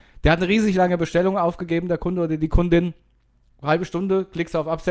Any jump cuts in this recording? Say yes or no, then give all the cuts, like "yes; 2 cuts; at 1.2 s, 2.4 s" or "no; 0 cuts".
no; 0 cuts